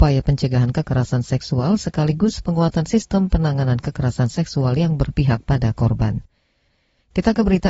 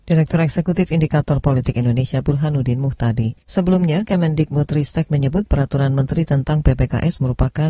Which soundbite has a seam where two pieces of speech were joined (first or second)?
second